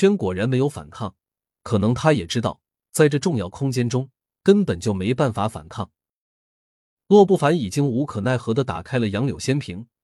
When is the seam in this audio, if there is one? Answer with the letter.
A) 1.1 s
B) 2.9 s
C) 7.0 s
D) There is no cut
C